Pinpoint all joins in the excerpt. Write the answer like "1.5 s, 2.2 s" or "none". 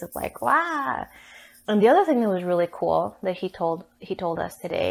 1.7 s